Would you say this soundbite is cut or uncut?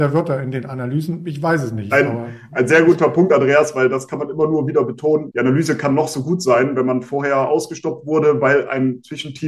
cut